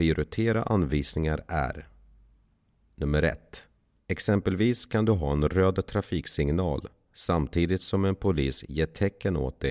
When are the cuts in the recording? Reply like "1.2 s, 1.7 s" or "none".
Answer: 4.0 s